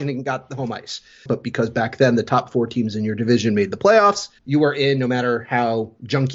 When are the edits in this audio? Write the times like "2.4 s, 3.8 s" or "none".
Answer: 1.3 s, 4.4 s